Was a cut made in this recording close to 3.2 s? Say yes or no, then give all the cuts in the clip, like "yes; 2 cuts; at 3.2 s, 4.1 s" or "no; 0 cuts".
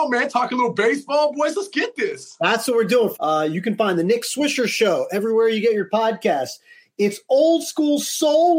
yes; 1 cut; at 3.2 s